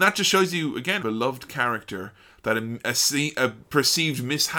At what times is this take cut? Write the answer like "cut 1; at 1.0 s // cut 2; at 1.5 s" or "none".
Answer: cut 1; at 1.0 s